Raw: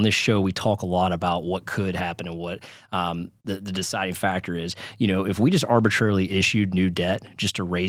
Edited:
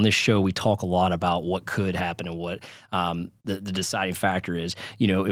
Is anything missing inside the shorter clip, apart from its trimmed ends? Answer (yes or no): no